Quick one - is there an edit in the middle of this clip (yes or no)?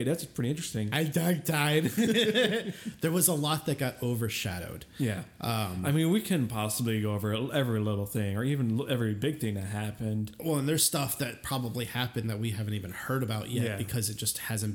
yes